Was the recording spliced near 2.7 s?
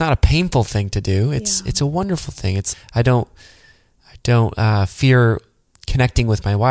yes; 1 cut; at 2.7 s

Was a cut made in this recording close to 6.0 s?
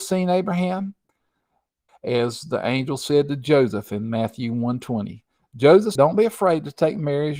yes; 2 cuts; at 1.9 s, 6.0 s

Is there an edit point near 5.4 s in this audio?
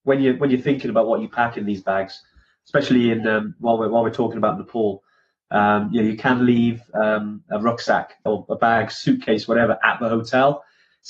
no; 1 cut; at 8.3 s

